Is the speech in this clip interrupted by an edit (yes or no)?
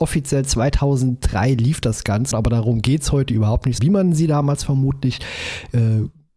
yes